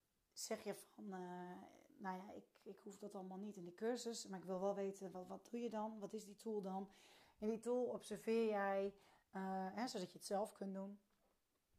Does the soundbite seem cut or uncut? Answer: uncut